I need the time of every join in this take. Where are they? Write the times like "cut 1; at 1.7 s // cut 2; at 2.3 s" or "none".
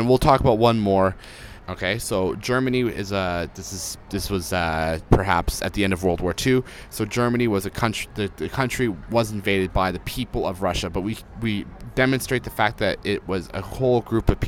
cut 1; at 1.6 s

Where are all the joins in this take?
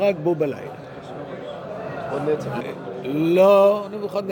cut 1; at 2.6 s

